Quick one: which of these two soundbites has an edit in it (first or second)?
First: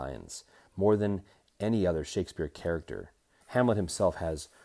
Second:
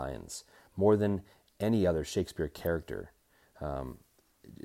first